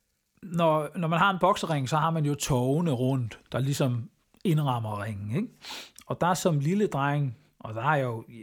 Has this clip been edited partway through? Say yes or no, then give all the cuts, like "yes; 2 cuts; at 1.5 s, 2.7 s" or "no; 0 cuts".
no; 0 cuts